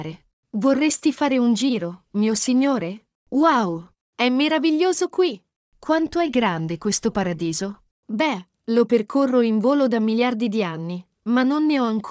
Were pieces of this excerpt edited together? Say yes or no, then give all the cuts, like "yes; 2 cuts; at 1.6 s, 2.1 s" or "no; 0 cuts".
no; 0 cuts